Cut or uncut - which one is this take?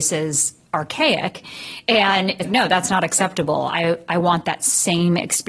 cut